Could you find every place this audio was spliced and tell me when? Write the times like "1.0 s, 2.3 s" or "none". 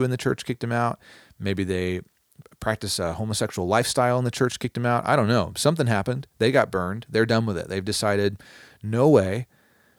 none